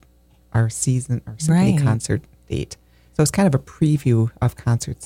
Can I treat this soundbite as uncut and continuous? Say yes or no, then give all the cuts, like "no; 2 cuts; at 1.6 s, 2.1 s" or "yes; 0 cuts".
yes; 0 cuts